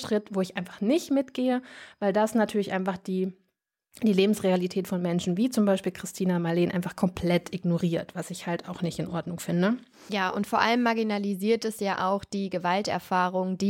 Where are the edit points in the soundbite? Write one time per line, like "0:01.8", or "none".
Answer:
none